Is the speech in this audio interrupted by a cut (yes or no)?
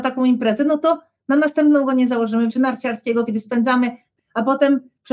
yes